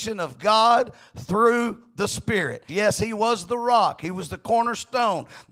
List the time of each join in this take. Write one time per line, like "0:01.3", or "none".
0:02.7